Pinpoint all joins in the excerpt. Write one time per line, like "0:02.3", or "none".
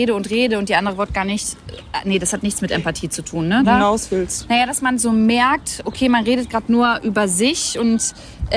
0:03.6